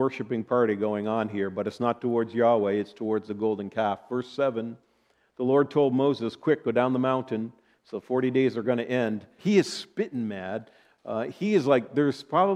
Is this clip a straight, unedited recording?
no; 1 cut; at 9.4 s

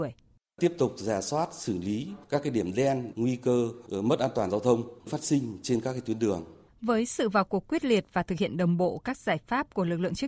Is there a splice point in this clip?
yes; 2 cuts; at 3.1 s, 6.7 s

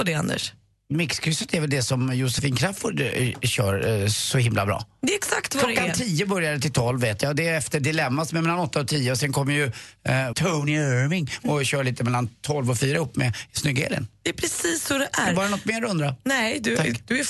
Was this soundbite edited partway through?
yes; 1 cut; at 10.3 s

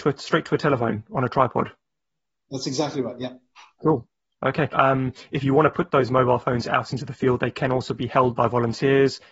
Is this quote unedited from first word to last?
no; 1 cut; at 4.7 s

